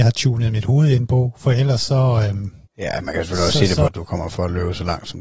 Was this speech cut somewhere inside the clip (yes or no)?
yes